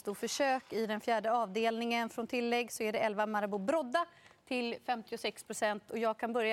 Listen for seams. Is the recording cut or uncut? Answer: uncut